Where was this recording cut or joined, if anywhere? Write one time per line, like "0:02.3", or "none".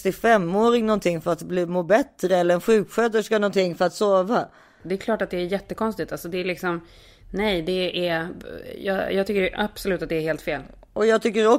none